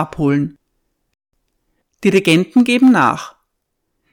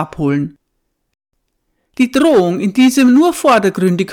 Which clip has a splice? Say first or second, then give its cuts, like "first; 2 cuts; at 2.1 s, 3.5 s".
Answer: first; 1 cut; at 1.8 s